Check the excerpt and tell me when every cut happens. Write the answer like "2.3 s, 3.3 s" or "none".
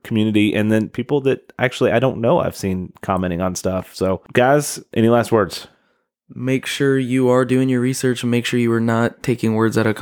none

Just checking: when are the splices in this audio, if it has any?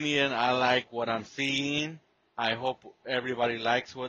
none

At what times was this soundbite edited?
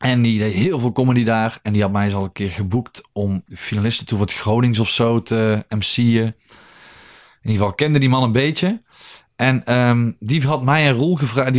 3.5 s

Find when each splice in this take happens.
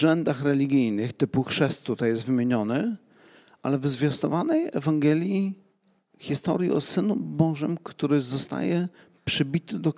none

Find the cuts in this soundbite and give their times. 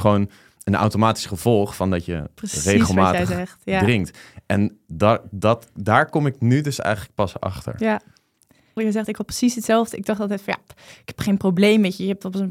8.8 s

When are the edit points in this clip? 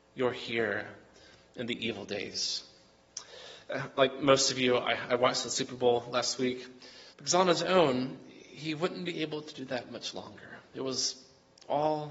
7.1 s

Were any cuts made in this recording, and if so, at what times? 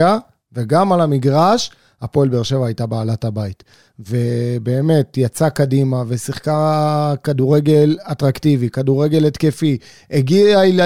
none

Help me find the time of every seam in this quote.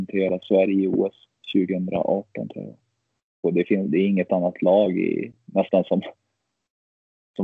3.4 s

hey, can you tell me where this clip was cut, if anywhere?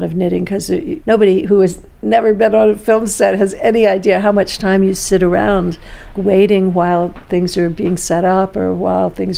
6.1 s

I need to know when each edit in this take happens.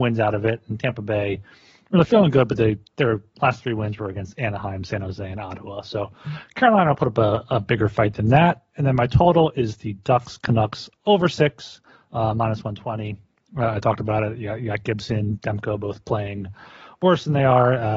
none

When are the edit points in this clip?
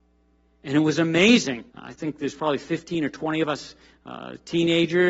1.7 s

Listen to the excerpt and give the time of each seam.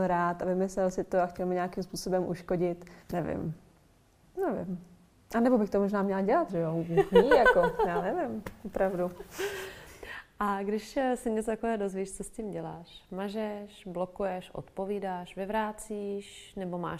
3.0 s, 6.5 s

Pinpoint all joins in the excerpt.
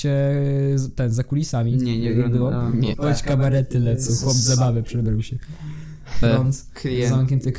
2.9 s, 6.2 s

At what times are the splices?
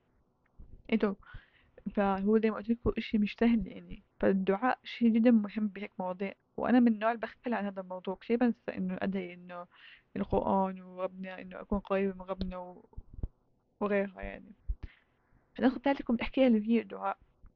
4.1 s

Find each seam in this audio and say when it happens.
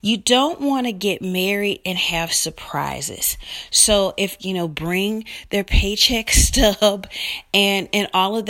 4.4 s

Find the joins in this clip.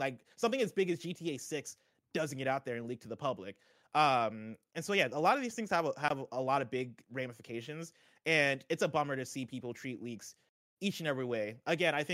none

